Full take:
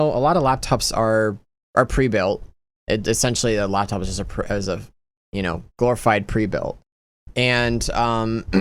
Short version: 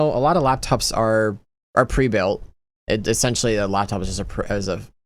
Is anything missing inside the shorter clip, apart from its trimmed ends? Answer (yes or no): no